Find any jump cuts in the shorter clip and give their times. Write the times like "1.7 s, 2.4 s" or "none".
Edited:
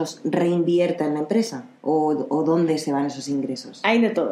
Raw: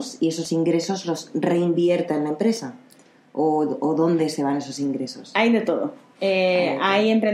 1.8 s